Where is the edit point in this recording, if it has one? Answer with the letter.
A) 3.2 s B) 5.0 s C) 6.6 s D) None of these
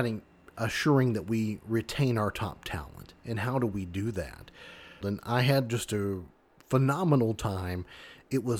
B